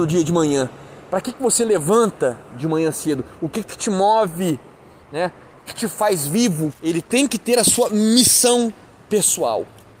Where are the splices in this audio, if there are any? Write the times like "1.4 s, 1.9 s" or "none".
5.7 s, 6.7 s